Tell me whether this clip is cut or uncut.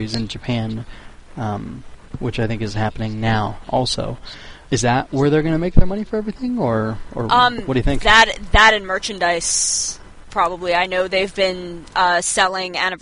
cut